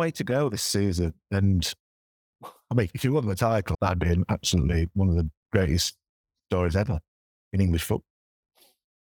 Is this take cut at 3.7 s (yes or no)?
yes